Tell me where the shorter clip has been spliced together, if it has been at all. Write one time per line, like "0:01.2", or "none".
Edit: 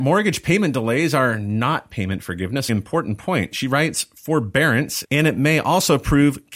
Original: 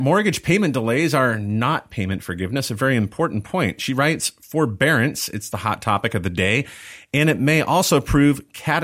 0:02.7
0:05.0